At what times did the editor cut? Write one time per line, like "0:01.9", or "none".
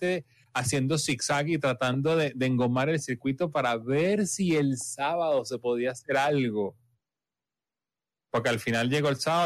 none